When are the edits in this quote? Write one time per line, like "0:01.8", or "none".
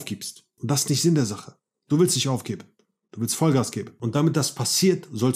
none